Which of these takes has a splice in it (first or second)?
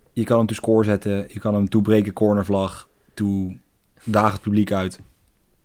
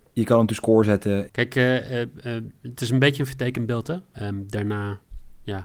second